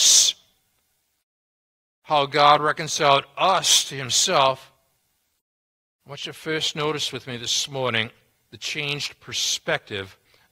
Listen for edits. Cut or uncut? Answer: uncut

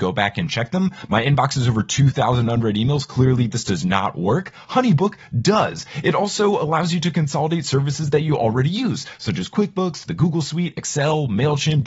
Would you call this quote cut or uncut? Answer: uncut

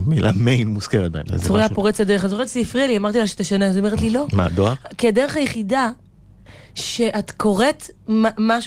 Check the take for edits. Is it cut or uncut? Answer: cut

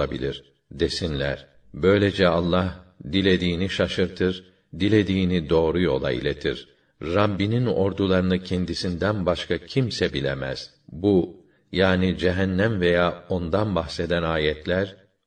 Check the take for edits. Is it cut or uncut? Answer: uncut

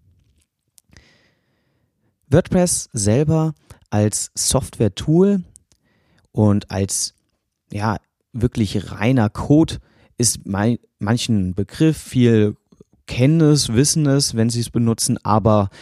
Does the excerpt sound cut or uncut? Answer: uncut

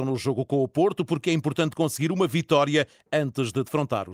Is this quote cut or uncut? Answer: uncut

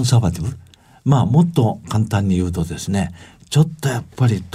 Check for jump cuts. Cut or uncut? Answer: uncut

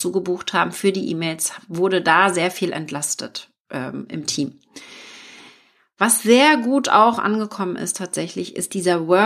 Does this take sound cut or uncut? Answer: uncut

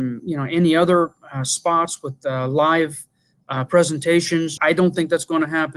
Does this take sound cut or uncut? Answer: cut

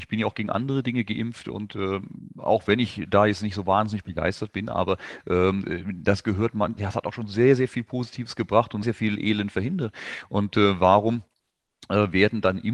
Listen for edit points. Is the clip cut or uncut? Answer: cut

